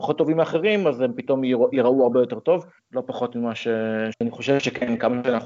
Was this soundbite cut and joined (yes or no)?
yes